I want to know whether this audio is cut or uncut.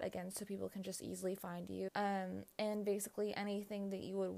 cut